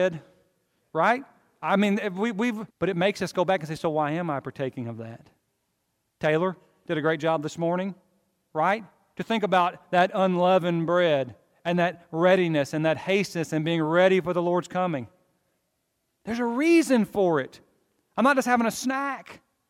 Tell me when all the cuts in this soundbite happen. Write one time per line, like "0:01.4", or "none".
0:02.7